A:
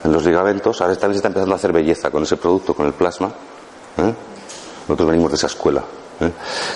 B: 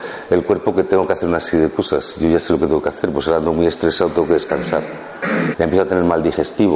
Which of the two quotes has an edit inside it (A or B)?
B